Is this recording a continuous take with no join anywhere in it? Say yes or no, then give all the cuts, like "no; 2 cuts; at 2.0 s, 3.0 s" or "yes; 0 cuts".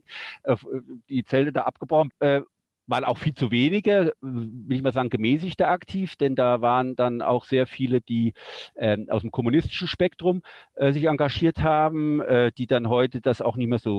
no; 1 cut; at 2.1 s